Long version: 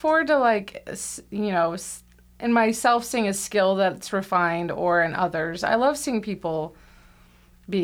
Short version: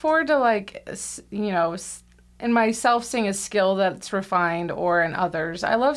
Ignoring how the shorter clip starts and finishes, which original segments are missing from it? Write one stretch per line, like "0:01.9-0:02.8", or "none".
none